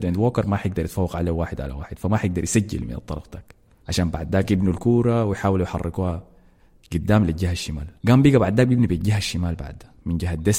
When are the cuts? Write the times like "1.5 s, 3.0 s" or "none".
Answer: 3.8 s, 8.0 s